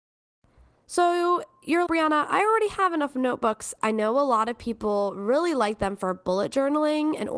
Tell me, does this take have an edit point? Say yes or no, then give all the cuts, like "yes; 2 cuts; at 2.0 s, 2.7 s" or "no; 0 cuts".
yes; 2 cuts; at 1.9 s, 3.8 s